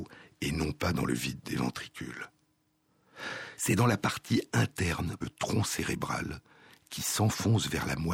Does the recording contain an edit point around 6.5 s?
no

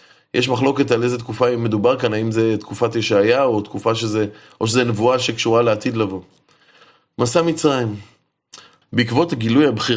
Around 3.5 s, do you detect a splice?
no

